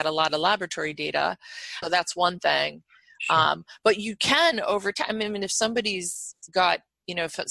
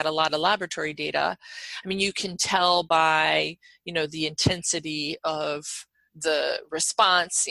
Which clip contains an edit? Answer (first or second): first